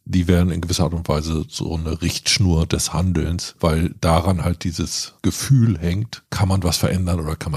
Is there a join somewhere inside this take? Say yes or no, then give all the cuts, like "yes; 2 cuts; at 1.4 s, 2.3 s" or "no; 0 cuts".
no; 0 cuts